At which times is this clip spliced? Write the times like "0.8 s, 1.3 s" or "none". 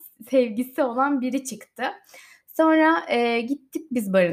none